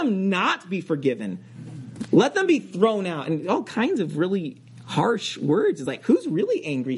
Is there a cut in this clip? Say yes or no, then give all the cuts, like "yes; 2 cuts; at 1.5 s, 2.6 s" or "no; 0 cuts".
no; 0 cuts